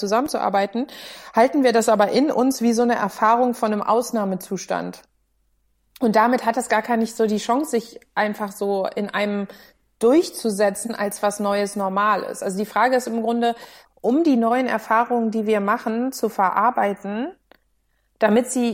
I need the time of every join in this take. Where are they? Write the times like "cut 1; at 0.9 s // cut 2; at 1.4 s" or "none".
cut 1; at 13.8 s